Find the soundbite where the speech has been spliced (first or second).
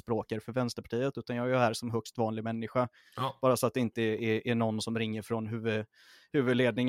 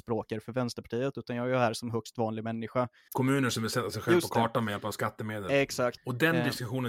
second